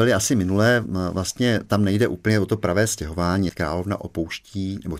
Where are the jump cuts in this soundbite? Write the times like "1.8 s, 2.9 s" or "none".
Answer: 3.5 s